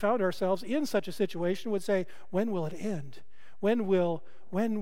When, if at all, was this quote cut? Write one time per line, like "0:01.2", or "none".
none